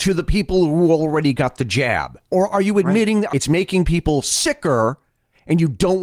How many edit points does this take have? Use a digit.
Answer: 1